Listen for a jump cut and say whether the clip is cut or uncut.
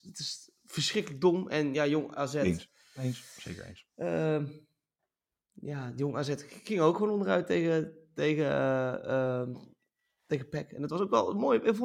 uncut